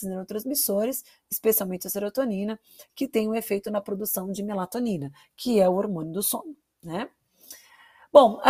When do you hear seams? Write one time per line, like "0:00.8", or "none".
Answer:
none